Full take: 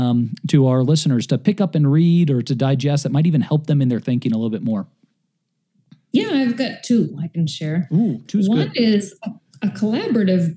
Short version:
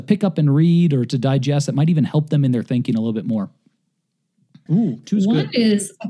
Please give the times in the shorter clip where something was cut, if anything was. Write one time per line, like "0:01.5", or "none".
0:04.7